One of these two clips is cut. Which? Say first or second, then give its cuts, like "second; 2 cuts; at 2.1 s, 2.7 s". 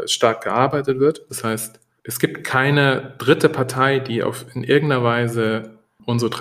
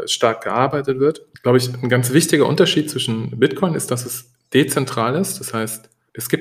first; 1 cut; at 1.3 s